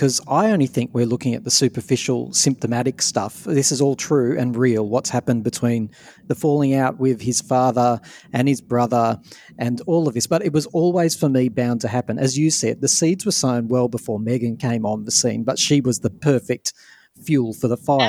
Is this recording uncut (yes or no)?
yes